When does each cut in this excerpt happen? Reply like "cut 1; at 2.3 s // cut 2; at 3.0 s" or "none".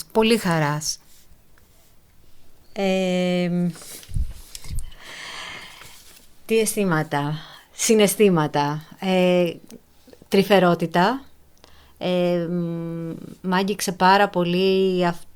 none